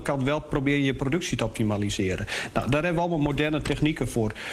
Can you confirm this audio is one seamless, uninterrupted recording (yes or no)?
yes